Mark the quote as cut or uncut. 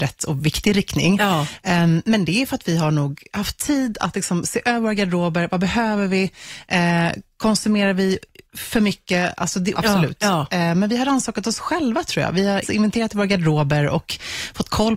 cut